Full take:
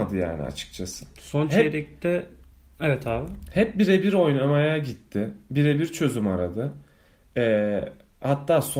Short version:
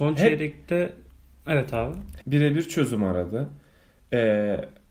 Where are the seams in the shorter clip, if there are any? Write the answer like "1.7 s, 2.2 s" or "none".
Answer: 2.2 s